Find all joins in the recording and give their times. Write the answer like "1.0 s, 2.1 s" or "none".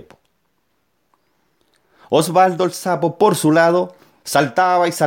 none